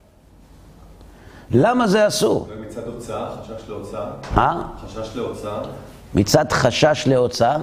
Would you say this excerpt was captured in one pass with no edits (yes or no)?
yes